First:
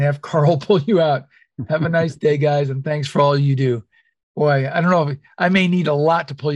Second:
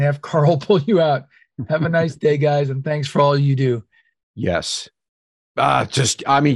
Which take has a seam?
second; 1 cut; at 4.2 s

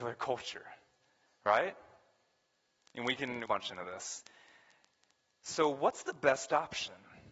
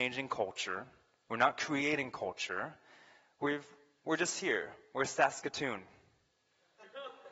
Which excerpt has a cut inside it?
first; 1 cut; at 3.5 s

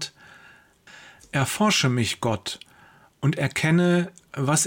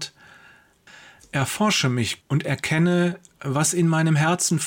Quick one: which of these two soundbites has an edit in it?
second; 1 cut; at 2.2 s

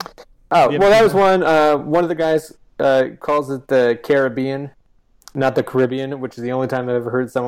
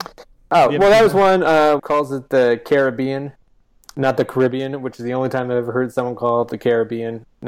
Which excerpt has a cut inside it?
second; 1 cut; at 1.8 s

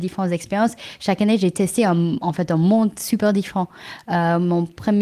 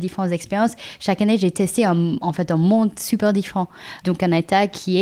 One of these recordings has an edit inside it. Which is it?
second; 1 cut; at 4.0 s

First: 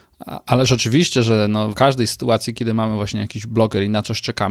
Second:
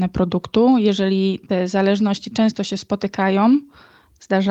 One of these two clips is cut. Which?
first; 1 cut; at 1.7 s

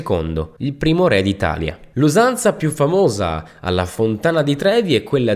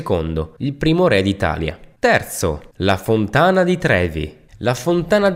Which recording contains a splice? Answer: first; 1 cut; at 1.9 s

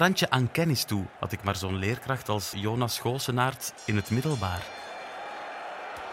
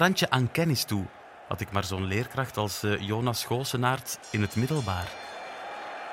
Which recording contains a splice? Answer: first; 2 cuts; at 1.2 s, 2.5 s

